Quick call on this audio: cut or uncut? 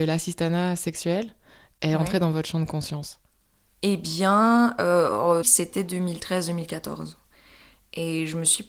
cut